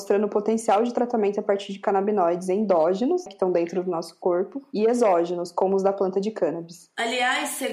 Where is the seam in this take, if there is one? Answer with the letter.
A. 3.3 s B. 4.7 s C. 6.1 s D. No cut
A